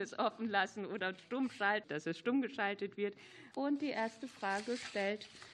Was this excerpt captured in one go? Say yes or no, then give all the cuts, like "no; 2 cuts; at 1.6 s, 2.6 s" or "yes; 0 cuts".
no; 2 cuts; at 1.8 s, 3.5 s